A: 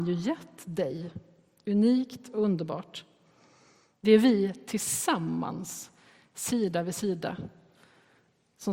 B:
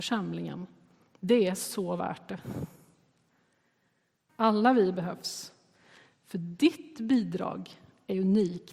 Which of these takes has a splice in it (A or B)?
B